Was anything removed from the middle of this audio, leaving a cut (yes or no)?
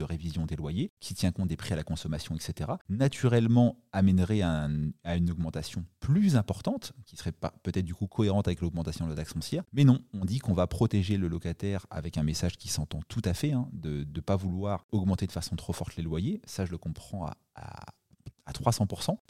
no